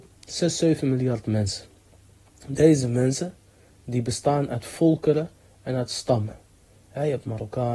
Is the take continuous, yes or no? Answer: yes